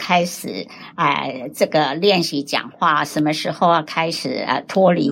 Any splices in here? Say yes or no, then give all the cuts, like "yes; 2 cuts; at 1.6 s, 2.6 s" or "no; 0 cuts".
no; 0 cuts